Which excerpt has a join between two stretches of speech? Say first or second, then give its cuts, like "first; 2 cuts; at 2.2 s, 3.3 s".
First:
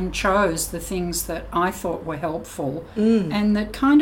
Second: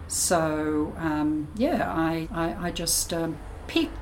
second; 1 cut; at 2.2 s